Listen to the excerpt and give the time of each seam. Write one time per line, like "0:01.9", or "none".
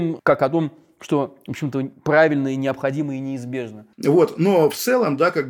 0:03.9